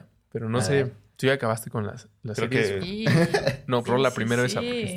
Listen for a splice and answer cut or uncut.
cut